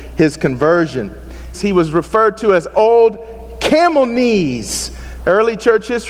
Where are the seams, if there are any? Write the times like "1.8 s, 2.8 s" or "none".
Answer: 1.5 s